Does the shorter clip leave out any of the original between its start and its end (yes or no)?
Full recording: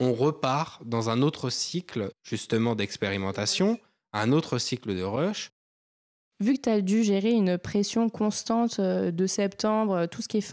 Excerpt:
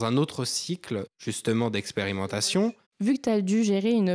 yes